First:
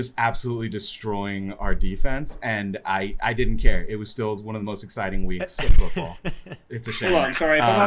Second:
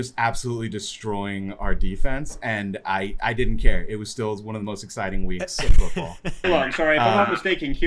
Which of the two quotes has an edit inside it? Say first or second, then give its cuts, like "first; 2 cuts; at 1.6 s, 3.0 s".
second; 1 cut; at 6.4 s